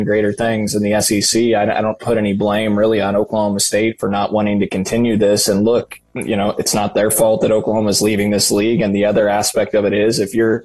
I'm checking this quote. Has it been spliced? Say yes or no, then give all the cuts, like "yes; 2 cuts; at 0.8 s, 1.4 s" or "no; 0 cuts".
no; 0 cuts